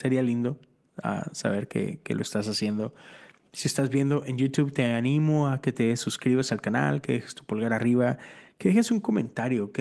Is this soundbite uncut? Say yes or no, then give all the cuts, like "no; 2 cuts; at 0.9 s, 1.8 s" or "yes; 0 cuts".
yes; 0 cuts